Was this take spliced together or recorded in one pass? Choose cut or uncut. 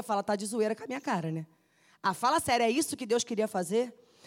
uncut